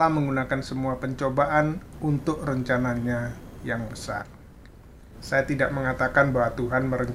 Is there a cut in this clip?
yes; 1 cut; at 5.2 s

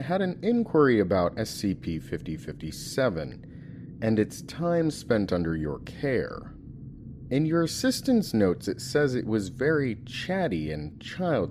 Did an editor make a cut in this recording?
no; 0 cuts

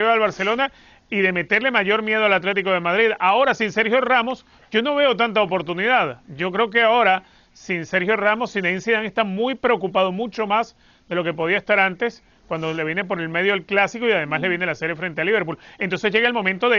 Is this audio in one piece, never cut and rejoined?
yes; 0 cuts

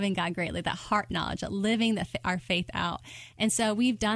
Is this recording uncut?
yes; 0 cuts

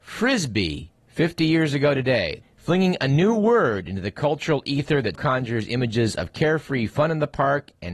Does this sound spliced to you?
yes; 2 cuts; at 2.4 s, 5.1 s

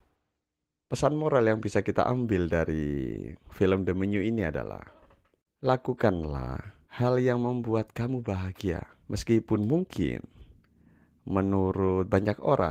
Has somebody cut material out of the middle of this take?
yes; 2 cuts; at 6.8 s, 9.0 s

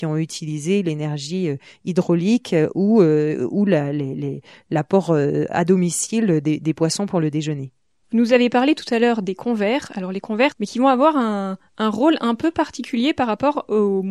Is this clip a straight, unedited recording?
no; 2 cuts; at 8.0 s, 10.5 s

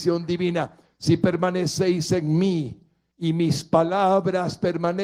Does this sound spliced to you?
no; 0 cuts

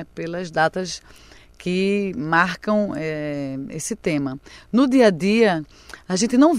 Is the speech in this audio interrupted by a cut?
no; 0 cuts

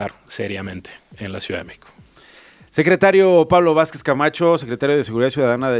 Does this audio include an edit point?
no; 0 cuts

